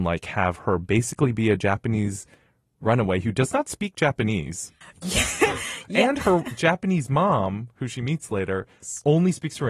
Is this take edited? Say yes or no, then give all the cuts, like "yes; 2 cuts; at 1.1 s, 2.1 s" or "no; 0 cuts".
no; 0 cuts